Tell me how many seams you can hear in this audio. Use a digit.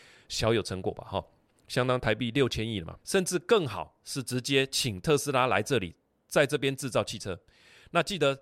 1